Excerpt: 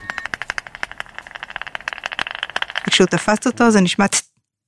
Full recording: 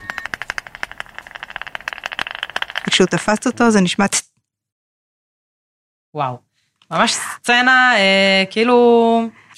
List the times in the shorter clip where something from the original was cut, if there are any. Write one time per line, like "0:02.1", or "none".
none

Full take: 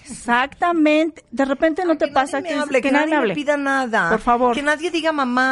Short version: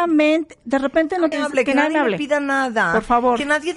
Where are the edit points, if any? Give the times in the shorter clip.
0:01.3

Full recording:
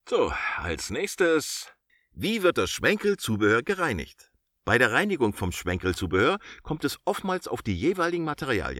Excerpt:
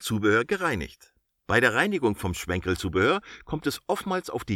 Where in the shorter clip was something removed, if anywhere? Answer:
none

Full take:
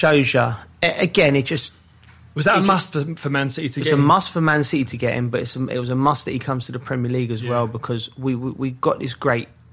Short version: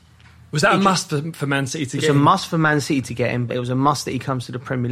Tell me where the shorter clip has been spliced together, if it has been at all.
0:03.5

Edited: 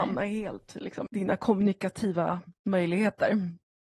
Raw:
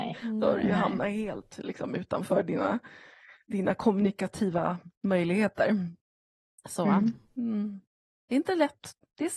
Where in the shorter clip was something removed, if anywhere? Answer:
0:01.1

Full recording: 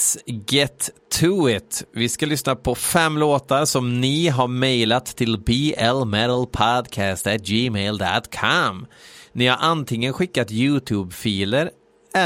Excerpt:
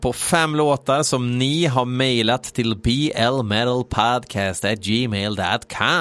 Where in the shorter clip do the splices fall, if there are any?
none

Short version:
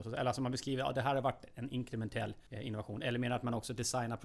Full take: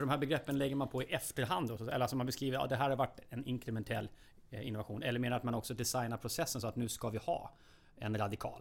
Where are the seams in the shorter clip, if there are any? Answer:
0:02.5

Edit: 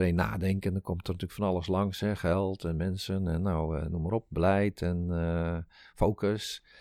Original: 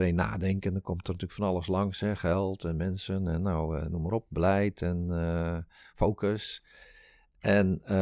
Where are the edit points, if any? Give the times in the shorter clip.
none

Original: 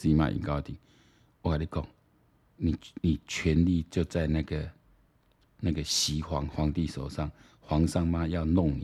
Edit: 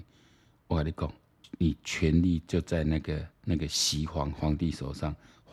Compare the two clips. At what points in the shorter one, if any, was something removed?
0:01.4
0:03.3

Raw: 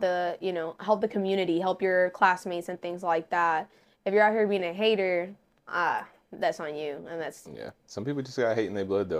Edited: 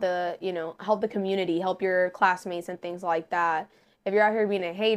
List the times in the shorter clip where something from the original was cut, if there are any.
none

